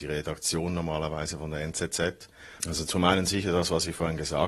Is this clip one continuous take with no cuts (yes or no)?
no